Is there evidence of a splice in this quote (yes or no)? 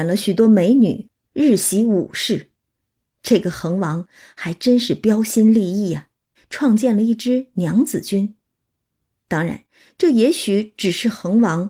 yes